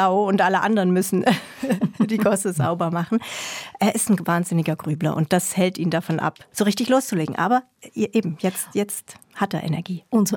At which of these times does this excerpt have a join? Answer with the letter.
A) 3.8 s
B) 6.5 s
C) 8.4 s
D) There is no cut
B